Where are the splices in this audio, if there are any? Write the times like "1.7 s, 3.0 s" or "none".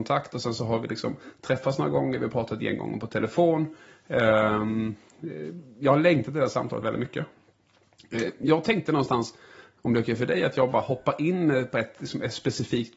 6.8 s